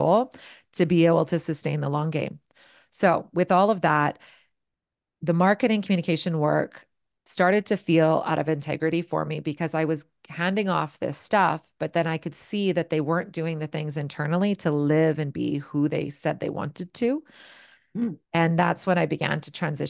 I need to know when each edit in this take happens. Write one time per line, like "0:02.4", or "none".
none